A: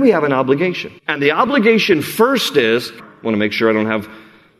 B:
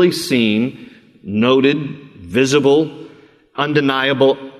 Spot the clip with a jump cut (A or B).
A